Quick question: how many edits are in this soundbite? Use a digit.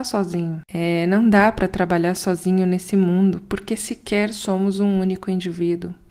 0